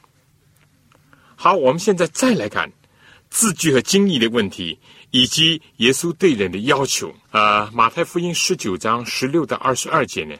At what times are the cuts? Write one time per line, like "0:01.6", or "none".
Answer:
0:02.5
0:07.2